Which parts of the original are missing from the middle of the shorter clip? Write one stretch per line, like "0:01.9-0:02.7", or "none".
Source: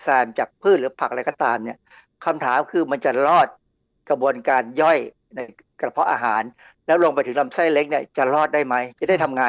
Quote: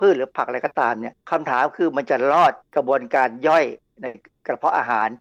0:01.8-0:02.2
0:03.6-0:04.0